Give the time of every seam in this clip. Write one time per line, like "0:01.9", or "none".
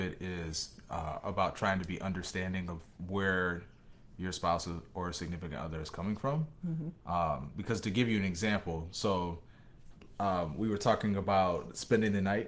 none